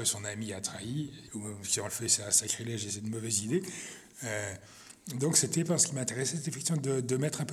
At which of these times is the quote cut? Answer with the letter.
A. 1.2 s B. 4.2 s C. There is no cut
A